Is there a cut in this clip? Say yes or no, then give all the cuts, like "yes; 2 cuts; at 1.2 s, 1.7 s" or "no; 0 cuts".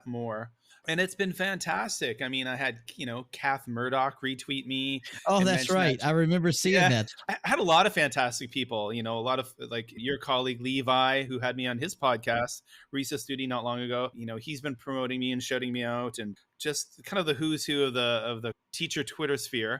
no; 0 cuts